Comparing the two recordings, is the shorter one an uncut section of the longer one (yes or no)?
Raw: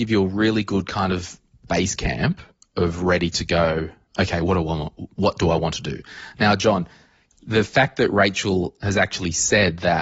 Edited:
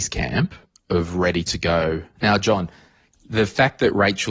no